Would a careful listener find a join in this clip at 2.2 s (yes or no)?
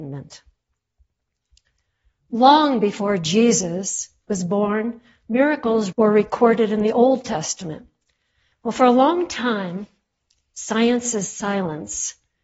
no